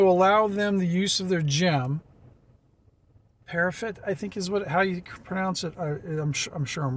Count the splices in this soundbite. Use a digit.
1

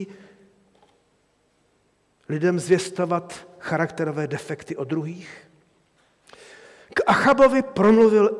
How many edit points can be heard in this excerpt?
0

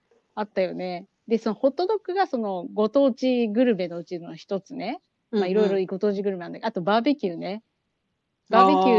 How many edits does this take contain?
0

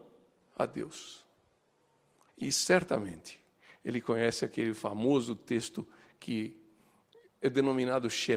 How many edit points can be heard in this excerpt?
1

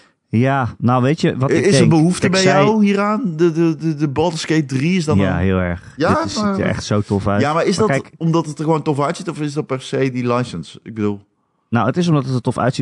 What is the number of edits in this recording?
0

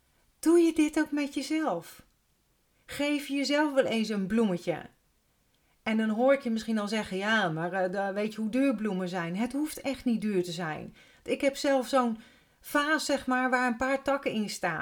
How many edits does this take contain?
0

